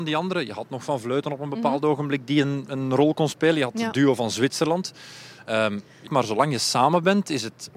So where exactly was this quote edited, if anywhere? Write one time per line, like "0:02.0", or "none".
0:06.1